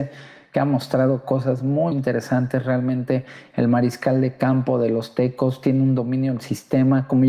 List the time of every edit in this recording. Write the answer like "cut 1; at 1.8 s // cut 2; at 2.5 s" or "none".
cut 1; at 1.9 s